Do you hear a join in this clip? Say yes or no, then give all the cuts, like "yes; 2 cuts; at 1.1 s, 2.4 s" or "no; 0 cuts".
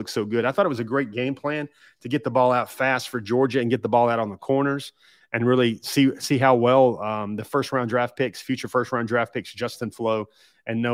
no; 0 cuts